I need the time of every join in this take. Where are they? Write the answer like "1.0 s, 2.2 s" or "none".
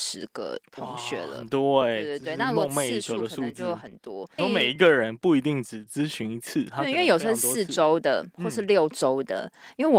4.4 s